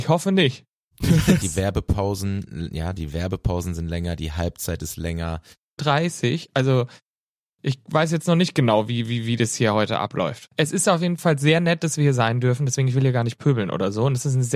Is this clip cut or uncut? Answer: cut